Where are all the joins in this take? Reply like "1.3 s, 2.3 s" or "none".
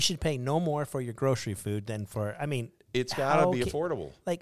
none